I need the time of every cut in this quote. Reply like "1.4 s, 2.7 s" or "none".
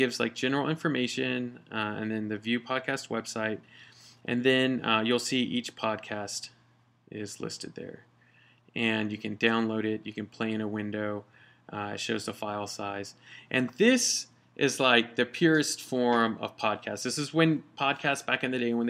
none